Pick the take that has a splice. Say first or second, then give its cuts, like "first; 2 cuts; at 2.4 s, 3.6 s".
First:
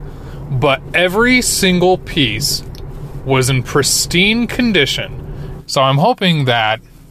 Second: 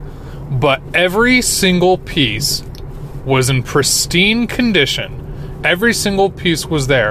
first; 1 cut; at 5.6 s